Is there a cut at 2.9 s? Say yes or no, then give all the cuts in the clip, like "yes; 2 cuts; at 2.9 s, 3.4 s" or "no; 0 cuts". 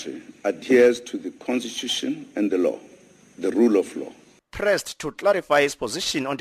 no; 1 cut; at 4.4 s